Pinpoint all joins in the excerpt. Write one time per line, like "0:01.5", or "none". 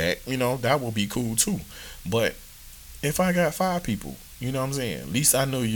none